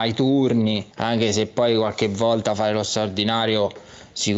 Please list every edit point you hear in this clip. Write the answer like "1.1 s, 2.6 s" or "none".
0.9 s